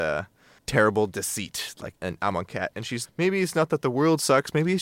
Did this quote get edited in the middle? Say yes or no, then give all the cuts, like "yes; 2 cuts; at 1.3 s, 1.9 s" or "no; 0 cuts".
yes; 2 cuts; at 1.9 s, 3.0 s